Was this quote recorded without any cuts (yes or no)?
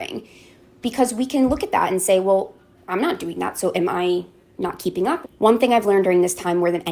no